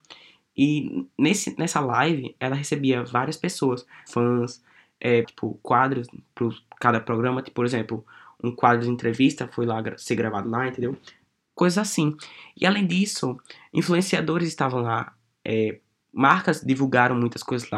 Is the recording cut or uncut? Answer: cut